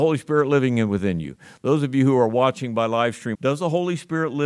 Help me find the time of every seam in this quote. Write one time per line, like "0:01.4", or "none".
0:03.3